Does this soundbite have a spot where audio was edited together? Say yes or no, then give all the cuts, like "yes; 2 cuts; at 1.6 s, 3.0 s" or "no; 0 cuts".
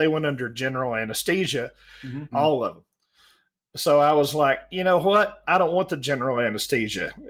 yes; 1 cut; at 2.3 s